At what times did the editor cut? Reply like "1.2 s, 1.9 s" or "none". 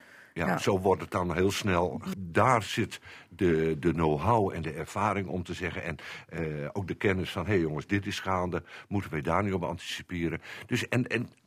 2.1 s